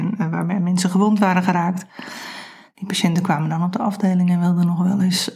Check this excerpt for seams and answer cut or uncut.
uncut